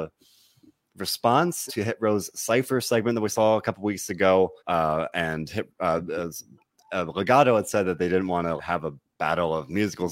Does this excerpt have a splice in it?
yes; 3 cuts; at 1.7 s, 4.6 s, 8.6 s

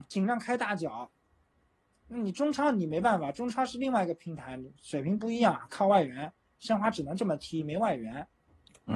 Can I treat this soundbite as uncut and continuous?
yes; 0 cuts

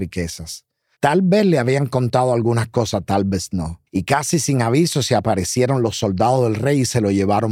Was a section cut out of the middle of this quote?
yes; 2 cuts; at 0.9 s, 3.9 s

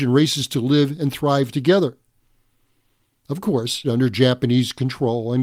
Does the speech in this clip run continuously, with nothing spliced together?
no; 1 cut; at 3.8 s

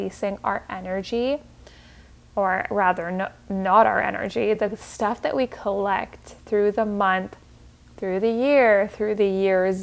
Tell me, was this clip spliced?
no; 0 cuts

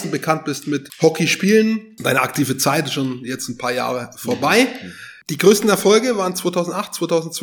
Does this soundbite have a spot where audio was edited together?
no; 0 cuts

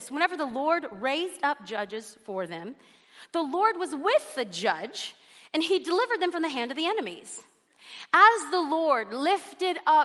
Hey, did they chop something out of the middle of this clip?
no; 0 cuts

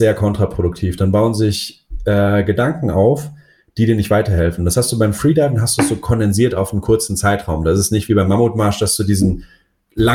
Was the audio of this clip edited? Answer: no; 0 cuts

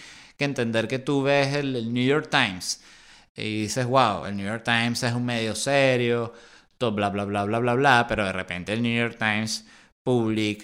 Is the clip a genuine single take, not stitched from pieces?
yes; 0 cuts

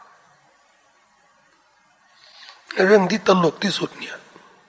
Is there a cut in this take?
no; 0 cuts

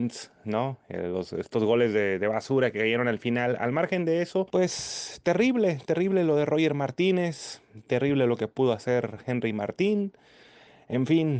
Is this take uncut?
yes; 0 cuts

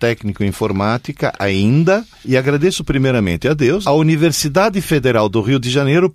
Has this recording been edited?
yes; 2 cuts; at 2.1 s, 3.8 s

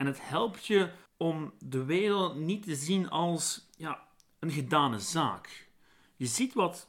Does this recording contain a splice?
yes; 1 cut; at 1.1 s

